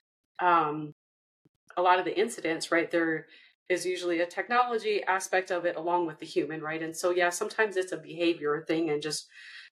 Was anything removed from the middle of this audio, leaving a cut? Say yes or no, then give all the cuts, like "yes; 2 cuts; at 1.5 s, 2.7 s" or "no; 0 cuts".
no; 0 cuts